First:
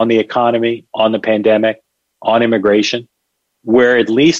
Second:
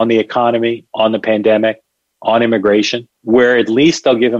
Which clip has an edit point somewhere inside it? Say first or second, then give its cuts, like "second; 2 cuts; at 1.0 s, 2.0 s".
second; 1 cut; at 3.1 s